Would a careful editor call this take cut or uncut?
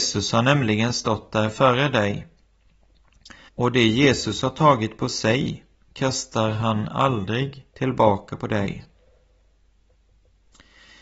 cut